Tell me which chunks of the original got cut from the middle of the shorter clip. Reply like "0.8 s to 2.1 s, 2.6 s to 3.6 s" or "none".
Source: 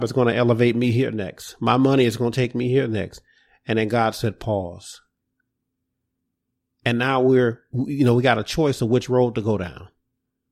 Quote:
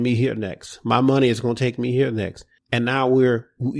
3.3 s to 6.7 s